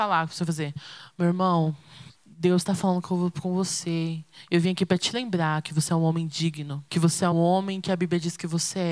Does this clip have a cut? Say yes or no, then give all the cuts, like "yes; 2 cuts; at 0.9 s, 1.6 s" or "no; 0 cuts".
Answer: yes; 1 cut; at 7.3 s